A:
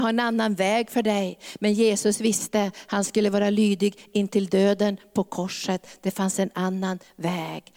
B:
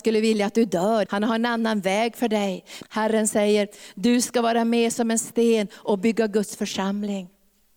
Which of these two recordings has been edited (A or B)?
B